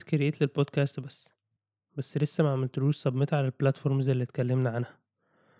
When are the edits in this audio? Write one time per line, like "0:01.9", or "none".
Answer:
none